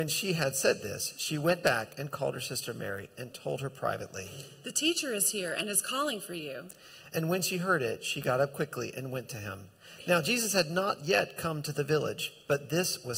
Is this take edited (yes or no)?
no